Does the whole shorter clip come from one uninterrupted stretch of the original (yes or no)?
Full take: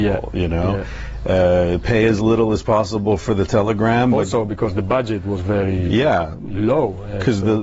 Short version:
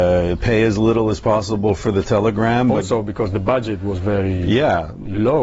yes